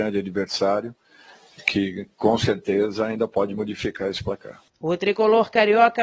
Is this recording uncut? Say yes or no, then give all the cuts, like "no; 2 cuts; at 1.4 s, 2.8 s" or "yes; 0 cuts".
no; 1 cut; at 4.7 s